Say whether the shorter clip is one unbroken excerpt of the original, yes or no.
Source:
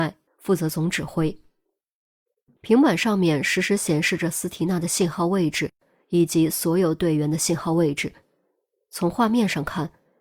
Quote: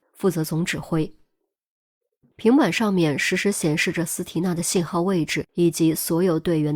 no